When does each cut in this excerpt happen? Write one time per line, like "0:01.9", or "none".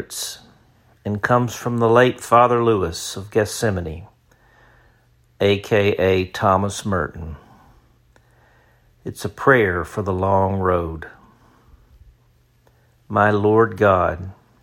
none